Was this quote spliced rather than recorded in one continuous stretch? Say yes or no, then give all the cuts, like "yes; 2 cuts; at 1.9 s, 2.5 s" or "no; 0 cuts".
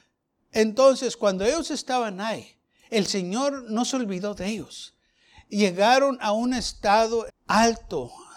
yes; 1 cut; at 7.3 s